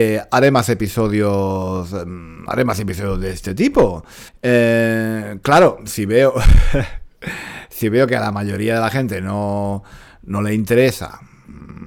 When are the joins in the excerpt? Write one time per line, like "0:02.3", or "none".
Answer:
0:04.3